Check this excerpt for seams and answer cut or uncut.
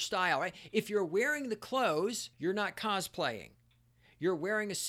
cut